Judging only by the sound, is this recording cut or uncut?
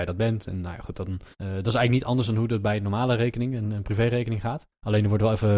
cut